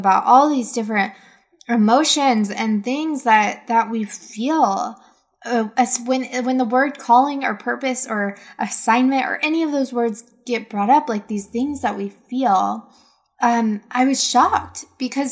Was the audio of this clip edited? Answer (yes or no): no